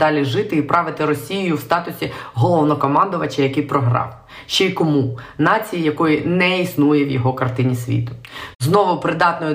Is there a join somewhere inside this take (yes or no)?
yes